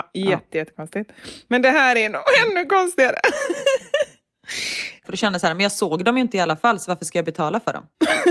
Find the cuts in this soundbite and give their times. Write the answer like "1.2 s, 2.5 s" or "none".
5.0 s